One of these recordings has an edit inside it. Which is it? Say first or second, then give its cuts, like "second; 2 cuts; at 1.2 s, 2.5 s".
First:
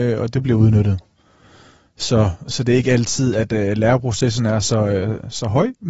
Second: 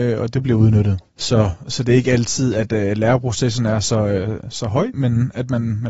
second; 2 cuts; at 1.1 s, 4.9 s